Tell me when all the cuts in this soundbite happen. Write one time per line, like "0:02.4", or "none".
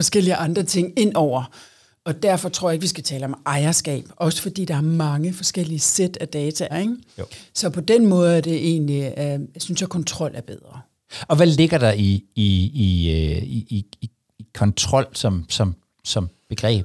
0:06.7